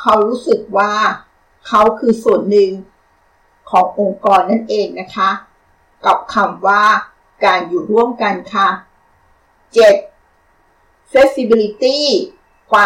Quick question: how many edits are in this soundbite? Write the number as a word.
zero